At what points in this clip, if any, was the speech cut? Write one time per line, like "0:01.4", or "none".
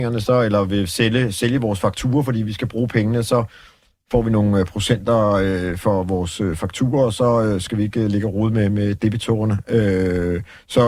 none